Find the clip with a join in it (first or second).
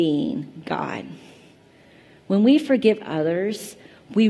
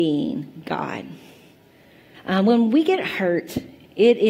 second